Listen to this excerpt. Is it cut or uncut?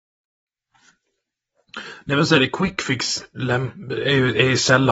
uncut